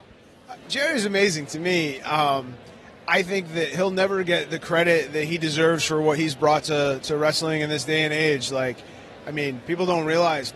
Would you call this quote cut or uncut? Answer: uncut